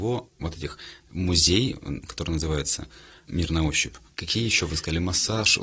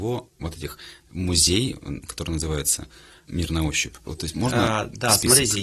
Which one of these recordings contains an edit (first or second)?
second